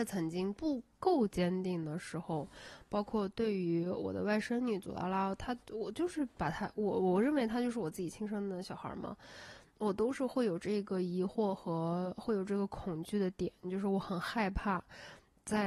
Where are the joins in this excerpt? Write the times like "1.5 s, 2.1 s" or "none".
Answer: 5.6 s